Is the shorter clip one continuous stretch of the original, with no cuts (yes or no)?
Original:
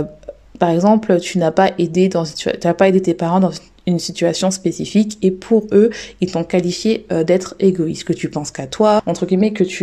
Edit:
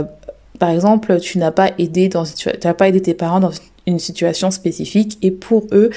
yes